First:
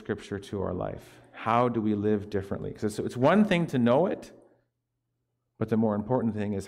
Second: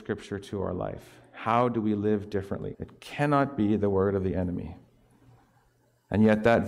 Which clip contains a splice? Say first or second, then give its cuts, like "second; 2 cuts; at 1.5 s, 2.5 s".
second; 1 cut; at 2.7 s